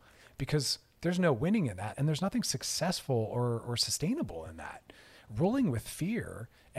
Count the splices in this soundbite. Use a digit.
1